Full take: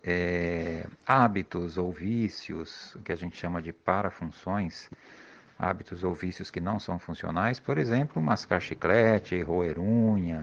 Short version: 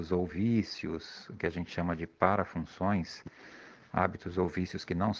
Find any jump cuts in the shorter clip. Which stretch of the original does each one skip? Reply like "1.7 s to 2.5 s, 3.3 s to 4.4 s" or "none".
none